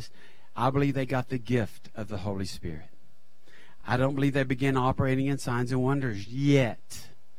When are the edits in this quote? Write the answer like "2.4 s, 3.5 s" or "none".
none